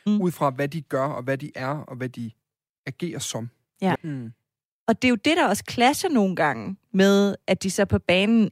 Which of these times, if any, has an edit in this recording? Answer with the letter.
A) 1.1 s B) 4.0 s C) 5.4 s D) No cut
B